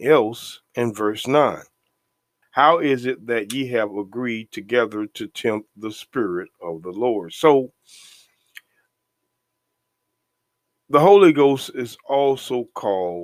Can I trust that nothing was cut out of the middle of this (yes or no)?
no